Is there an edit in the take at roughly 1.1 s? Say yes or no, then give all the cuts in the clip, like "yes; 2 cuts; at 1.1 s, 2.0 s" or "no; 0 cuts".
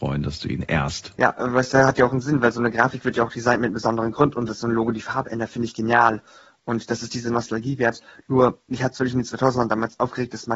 yes; 1 cut; at 1.1 s